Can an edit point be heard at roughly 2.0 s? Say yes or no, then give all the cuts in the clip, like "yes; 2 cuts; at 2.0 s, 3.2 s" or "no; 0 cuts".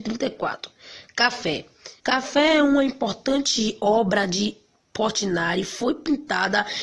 yes; 1 cut; at 2.0 s